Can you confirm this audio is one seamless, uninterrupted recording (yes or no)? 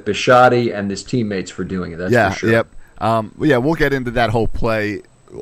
yes